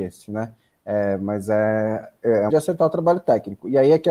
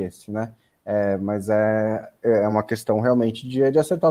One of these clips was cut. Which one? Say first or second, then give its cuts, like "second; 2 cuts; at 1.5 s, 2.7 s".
first; 1 cut; at 2.5 s